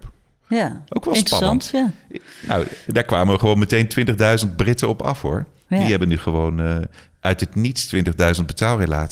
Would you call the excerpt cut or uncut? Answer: uncut